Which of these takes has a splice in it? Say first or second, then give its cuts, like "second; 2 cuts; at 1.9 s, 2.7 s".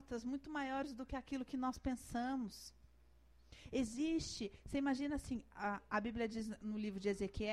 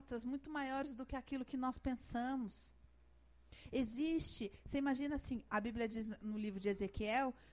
second; 1 cut; at 5.5 s